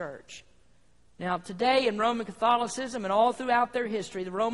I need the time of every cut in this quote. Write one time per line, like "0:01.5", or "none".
none